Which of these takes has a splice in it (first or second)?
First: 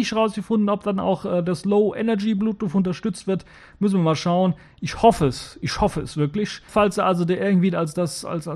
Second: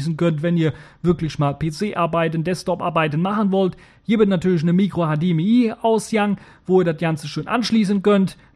first